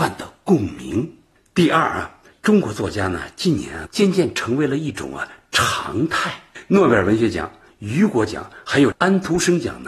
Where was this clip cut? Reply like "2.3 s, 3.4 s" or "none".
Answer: 3.9 s